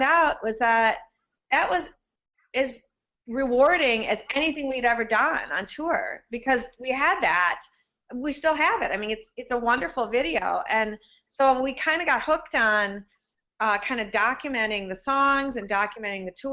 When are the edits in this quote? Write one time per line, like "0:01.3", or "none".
none